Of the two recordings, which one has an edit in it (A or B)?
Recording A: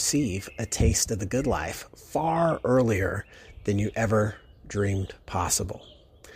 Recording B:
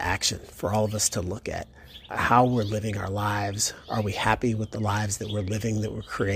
B